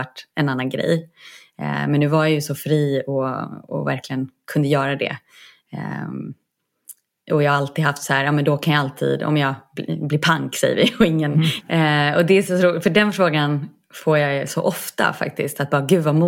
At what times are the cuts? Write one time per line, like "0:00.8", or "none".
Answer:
0:11.6